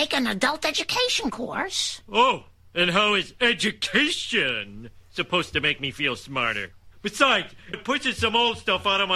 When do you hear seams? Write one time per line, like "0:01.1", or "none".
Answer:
0:07.7